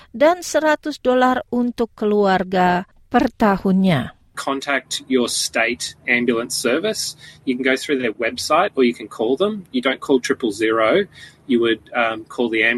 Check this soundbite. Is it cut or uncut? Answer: uncut